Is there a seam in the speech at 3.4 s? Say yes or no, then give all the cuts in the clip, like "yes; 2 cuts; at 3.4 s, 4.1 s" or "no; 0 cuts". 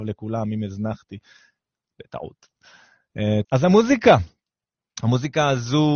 yes; 1 cut; at 3.4 s